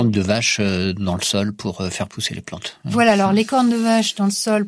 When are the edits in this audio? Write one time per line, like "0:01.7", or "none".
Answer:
none